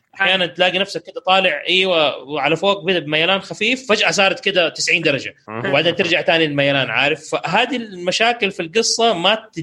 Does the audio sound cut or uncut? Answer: uncut